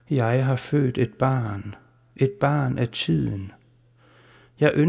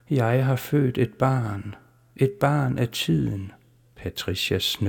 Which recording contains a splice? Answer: second; 1 cut; at 3.9 s

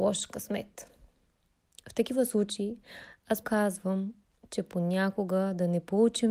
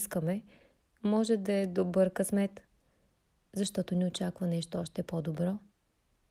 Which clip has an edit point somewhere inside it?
first; 1 cut; at 3.4 s

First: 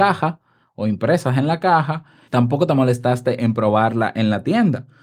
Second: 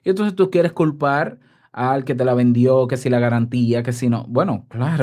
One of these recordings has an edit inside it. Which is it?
first; 1 cut; at 2.3 s

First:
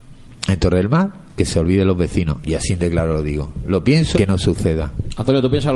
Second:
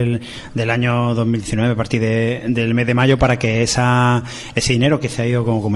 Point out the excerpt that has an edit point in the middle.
first; 2 cuts; at 2.4 s, 4.1 s

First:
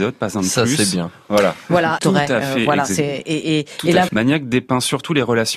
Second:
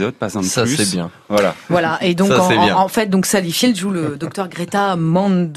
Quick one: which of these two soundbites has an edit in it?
first; 2 cuts; at 2.0 s, 4.1 s

